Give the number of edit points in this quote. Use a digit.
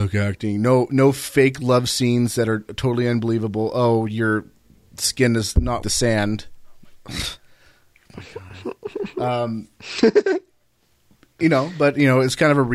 1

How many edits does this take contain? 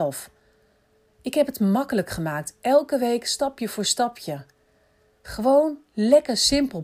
1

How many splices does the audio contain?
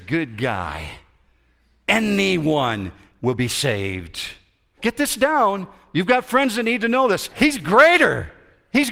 2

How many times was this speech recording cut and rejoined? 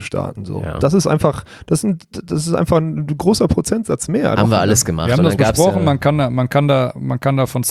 1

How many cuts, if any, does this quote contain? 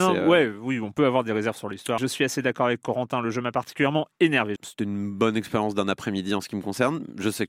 2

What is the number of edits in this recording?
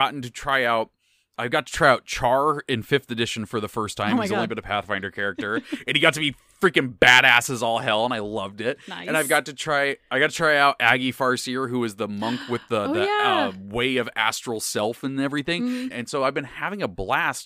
1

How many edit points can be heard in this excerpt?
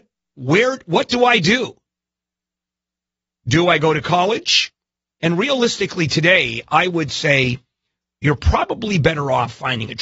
1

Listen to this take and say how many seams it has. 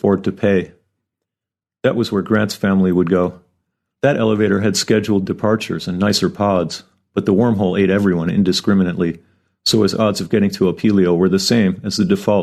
0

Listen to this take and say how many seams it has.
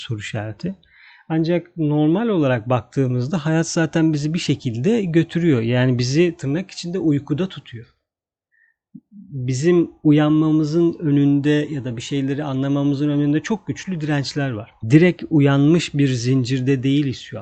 1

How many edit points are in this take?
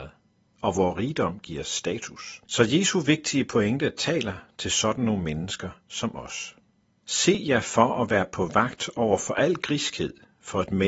2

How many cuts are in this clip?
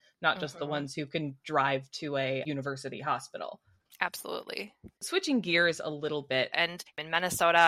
2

